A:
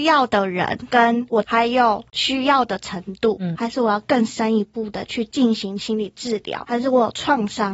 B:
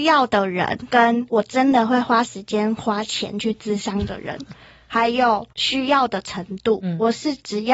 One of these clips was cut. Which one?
A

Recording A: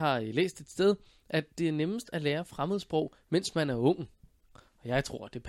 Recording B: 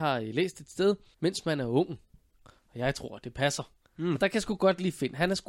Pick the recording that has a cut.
B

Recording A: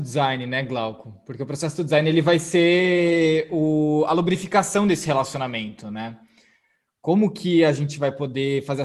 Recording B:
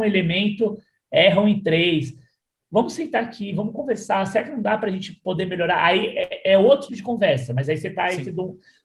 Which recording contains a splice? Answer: B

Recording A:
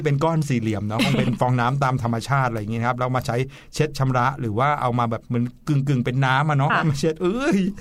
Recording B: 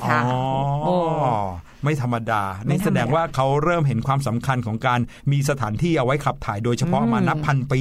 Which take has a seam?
A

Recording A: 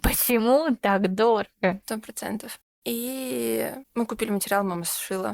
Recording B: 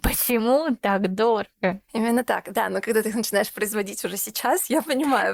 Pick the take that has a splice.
A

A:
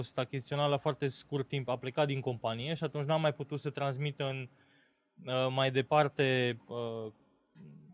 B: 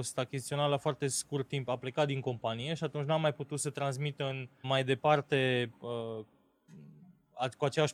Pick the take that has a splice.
B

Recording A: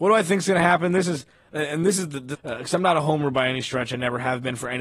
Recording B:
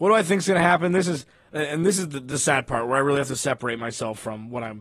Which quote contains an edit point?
A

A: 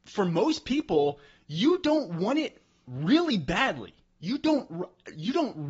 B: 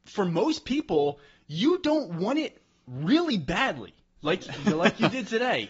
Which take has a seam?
B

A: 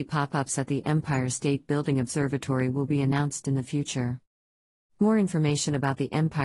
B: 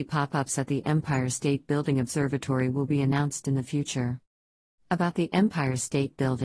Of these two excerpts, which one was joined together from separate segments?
B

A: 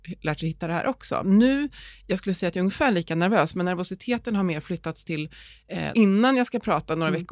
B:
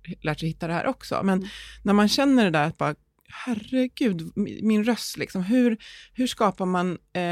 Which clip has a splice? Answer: A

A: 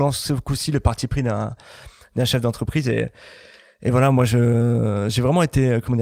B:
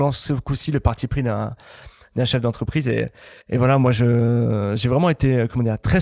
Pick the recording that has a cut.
B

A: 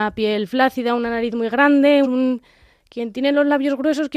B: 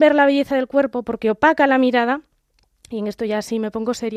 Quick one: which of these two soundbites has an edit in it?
A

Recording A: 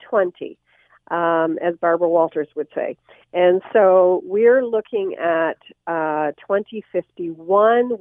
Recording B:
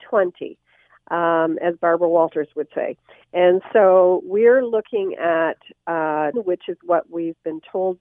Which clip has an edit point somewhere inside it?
B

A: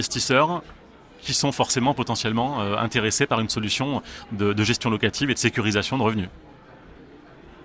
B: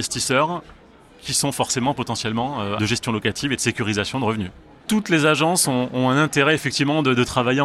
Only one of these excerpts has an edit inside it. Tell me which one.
B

